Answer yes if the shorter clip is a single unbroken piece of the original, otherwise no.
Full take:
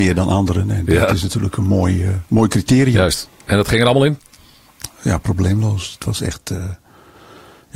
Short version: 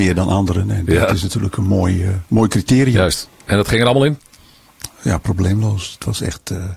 yes